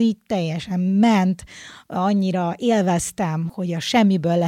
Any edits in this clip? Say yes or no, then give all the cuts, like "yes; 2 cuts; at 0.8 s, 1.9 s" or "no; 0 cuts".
no; 0 cuts